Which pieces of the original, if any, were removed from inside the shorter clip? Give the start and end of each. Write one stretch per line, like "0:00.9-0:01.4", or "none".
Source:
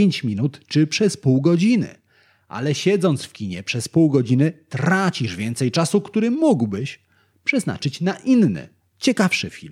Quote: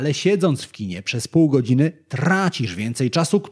none